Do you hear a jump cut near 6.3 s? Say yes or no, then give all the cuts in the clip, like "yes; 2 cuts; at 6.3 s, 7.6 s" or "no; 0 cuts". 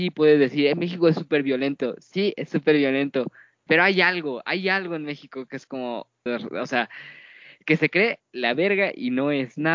yes; 2 cuts; at 3.7 s, 6.3 s